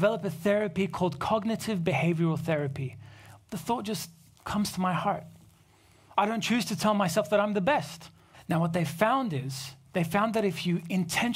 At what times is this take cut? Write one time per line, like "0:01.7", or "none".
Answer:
0:03.4
0:08.3